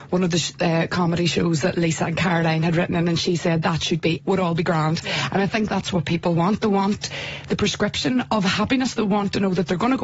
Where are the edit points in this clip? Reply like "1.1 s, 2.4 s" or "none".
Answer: 4.2 s